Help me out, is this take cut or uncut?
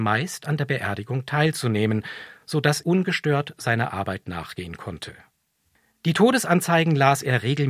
cut